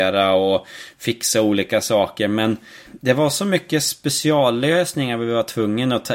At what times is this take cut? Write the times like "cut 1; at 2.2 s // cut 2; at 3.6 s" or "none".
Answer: cut 1; at 2.9 s